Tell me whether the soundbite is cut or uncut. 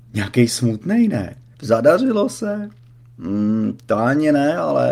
cut